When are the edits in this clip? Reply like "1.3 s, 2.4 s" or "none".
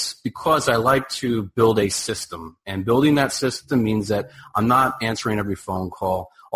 none